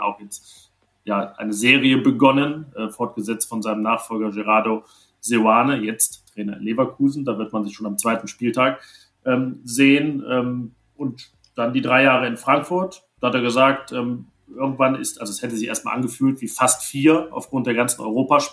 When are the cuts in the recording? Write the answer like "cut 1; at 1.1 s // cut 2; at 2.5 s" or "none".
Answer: cut 1; at 10.9 s